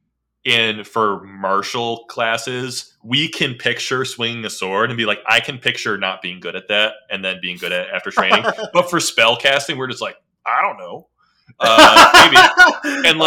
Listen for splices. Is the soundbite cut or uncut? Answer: uncut